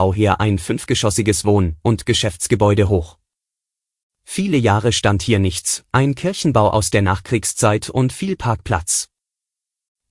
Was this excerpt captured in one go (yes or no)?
yes